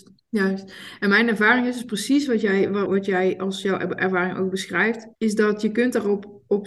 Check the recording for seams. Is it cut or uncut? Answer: cut